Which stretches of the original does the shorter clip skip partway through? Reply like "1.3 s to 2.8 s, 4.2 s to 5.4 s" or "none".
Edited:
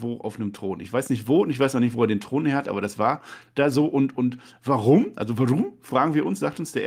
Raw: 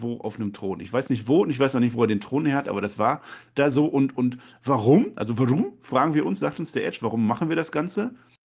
none